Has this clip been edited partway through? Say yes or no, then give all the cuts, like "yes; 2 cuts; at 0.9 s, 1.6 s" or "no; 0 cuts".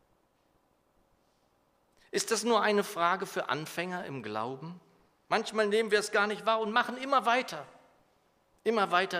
yes; 1 cut; at 5.2 s